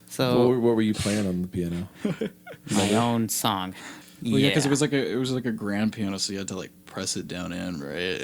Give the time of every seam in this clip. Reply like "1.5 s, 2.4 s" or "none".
4.0 s